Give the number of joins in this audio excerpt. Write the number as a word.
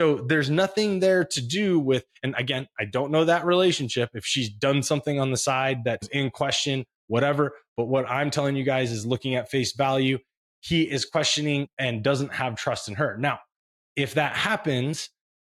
zero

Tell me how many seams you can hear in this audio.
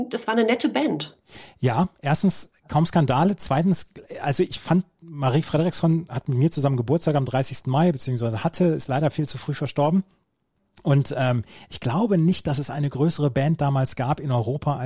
zero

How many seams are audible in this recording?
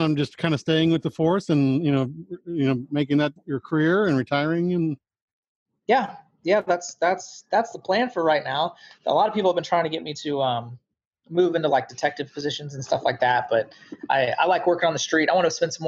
one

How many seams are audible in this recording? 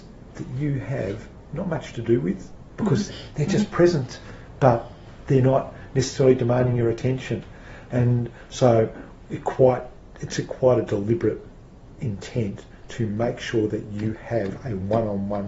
one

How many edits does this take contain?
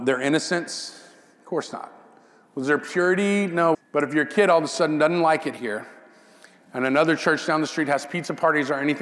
one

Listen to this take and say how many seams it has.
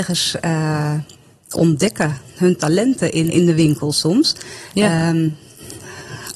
one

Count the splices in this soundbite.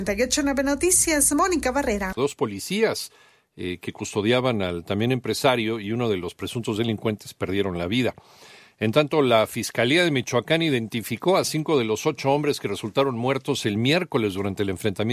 one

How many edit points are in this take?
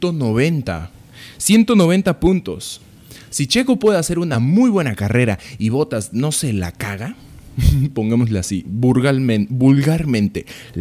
zero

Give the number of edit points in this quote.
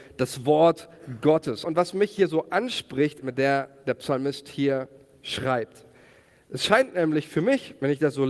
two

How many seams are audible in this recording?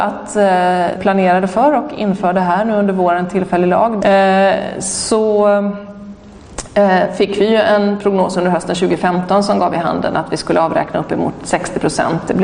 two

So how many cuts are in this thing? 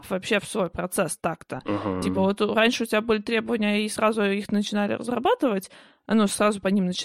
zero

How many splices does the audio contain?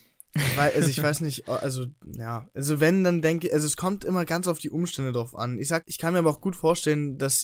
one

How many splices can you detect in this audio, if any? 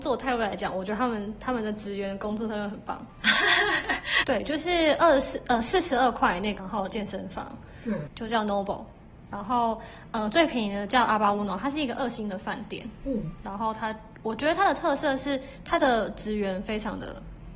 three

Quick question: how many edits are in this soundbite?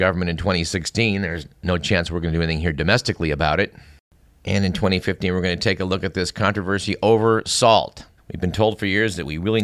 one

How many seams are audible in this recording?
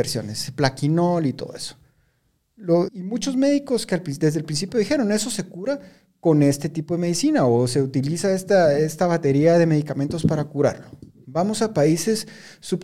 one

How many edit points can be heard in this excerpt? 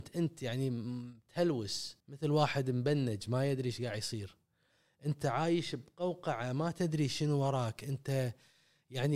one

